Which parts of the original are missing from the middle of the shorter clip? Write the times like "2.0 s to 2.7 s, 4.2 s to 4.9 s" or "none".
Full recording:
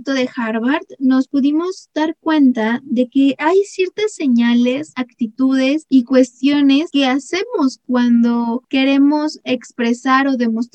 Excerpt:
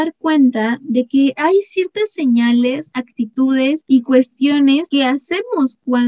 none